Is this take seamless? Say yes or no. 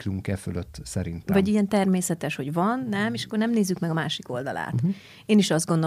yes